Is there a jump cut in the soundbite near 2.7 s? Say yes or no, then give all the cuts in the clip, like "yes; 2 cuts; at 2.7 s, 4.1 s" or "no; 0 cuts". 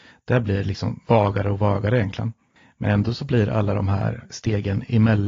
no; 1 cut; at 1.0 s